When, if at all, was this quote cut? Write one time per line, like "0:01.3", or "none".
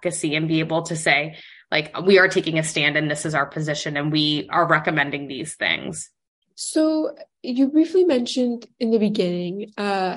0:06.4